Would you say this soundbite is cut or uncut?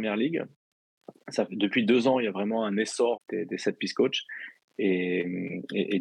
cut